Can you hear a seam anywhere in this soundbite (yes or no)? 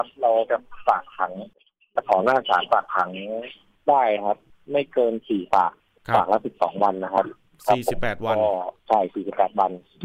yes